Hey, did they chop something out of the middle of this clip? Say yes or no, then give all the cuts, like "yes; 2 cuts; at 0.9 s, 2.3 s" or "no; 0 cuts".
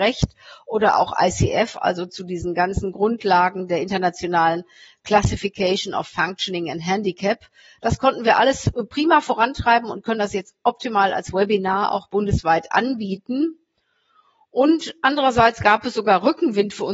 no; 0 cuts